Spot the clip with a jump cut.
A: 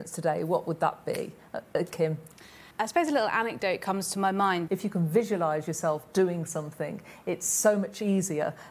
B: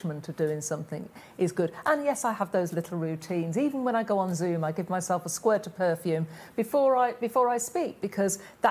A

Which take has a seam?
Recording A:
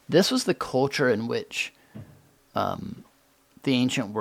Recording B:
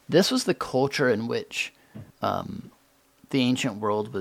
B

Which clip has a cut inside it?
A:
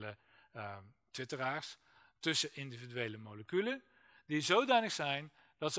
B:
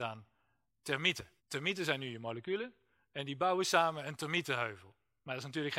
B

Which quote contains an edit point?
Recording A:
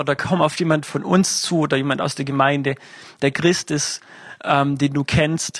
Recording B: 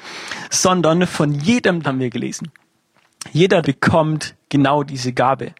B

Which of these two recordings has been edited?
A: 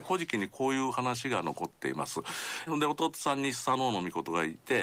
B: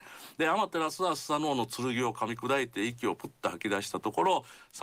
A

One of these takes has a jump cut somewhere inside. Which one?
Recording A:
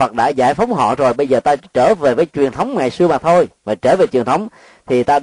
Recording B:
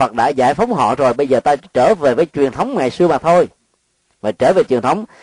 A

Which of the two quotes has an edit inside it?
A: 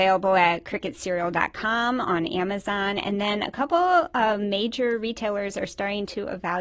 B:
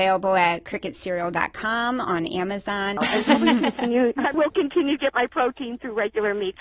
B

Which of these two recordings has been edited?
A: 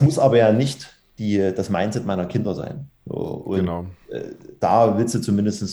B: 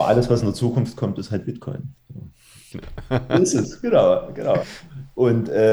B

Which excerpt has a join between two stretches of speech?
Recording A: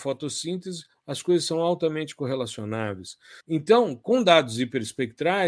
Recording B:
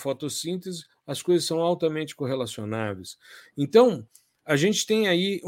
A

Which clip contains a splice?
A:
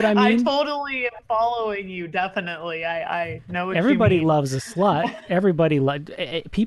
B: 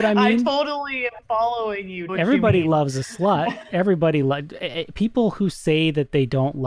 B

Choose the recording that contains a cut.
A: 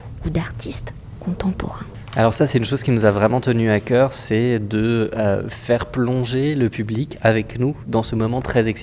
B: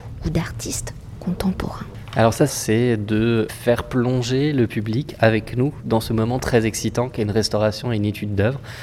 B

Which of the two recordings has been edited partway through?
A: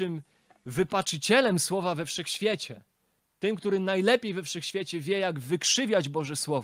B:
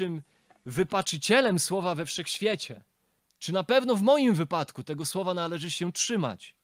B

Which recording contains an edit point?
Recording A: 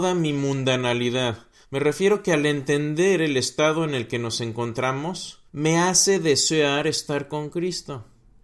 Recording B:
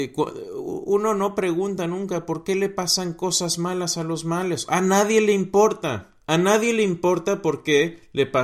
A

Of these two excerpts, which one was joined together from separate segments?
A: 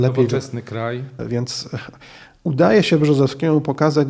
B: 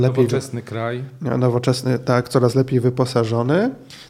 A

